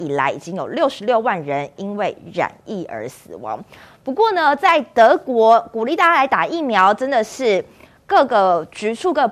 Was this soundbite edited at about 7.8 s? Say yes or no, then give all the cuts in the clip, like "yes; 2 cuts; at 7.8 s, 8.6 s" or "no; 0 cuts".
no; 0 cuts